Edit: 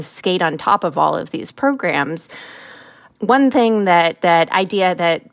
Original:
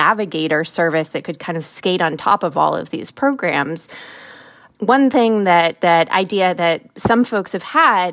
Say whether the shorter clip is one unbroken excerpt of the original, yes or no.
yes